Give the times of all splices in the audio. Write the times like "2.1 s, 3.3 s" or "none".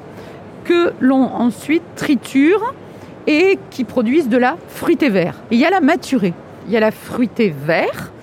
5.5 s, 6.6 s